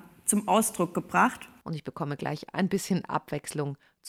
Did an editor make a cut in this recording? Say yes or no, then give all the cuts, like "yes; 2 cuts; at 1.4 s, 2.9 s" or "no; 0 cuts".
yes; 1 cut; at 1.6 s